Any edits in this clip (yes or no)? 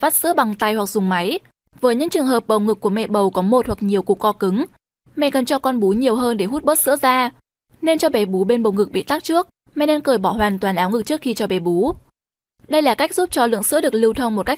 yes